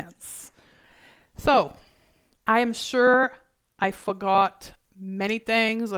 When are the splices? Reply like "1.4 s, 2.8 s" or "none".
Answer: none